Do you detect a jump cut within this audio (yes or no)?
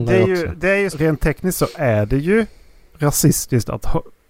yes